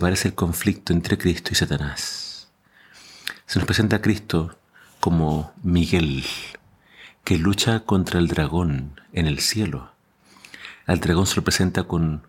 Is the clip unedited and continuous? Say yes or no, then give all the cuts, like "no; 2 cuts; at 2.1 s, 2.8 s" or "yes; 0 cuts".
yes; 0 cuts